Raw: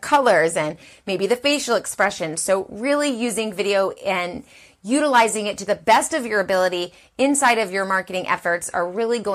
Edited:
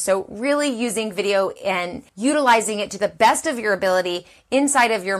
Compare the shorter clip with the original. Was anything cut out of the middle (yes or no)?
yes